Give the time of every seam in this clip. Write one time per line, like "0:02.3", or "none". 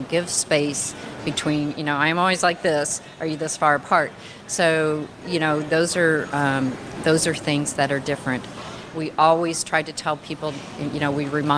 none